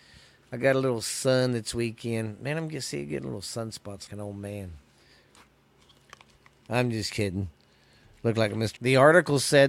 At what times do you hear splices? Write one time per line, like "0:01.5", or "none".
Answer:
0:04.1
0:08.8